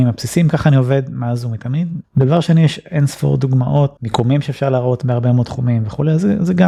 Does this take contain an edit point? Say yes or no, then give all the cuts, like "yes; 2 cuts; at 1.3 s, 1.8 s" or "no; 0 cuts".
yes; 2 cuts; at 2.0 s, 4.0 s